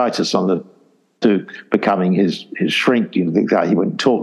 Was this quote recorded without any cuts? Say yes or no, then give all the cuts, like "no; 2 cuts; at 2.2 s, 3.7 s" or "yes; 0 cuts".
yes; 0 cuts